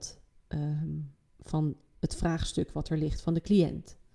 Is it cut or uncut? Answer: uncut